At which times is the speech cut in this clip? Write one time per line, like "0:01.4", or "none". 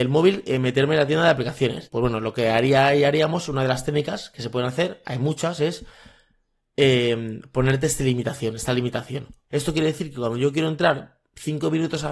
0:01.9
0:09.5